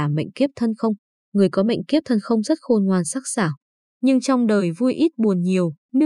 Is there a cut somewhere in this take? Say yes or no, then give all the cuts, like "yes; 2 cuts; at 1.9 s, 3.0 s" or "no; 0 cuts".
no; 0 cuts